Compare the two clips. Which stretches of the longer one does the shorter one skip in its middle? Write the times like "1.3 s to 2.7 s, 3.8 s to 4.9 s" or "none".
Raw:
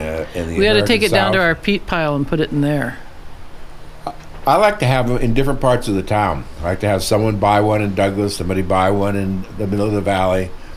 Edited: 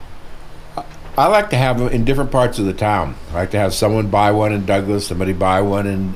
none